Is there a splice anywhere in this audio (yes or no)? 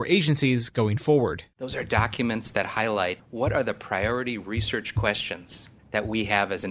no